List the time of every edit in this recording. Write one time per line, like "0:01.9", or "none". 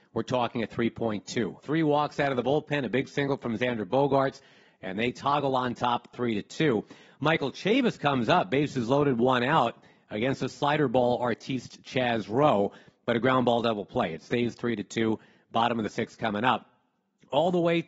0:01.6